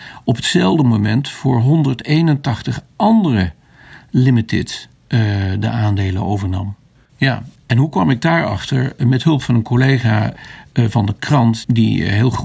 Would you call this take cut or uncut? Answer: cut